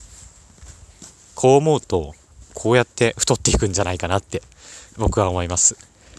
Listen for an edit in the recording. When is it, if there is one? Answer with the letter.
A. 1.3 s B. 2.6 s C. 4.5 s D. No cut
A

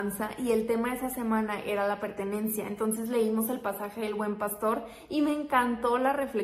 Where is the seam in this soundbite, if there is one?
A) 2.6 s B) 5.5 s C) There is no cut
C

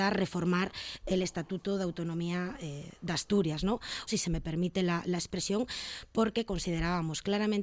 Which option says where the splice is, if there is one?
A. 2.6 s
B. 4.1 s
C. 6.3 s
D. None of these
B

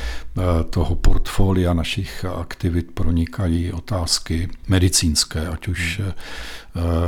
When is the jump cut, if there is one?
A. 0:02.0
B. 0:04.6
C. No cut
B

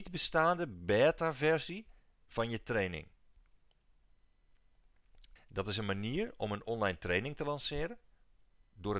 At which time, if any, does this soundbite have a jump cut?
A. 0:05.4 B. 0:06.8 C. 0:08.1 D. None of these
A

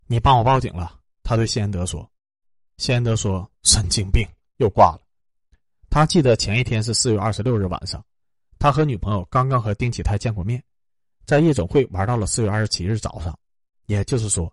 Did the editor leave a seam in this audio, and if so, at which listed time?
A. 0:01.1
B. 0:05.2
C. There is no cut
B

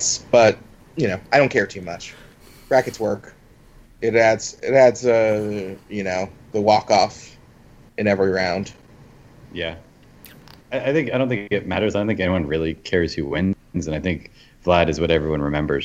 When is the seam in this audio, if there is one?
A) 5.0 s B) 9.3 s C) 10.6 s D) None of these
C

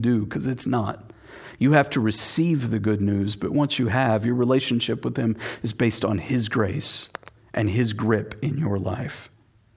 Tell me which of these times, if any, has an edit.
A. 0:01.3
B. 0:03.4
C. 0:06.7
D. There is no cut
D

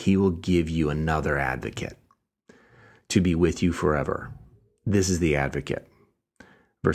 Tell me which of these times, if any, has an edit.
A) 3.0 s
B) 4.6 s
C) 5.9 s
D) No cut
D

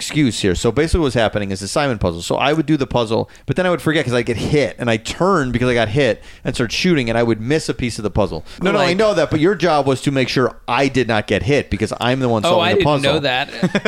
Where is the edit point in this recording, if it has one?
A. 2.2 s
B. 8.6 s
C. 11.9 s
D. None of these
B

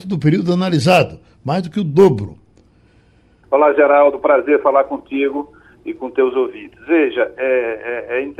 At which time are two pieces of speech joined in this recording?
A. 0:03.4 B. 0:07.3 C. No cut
A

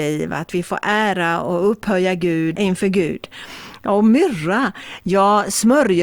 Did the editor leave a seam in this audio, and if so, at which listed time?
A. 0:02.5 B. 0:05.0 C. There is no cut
A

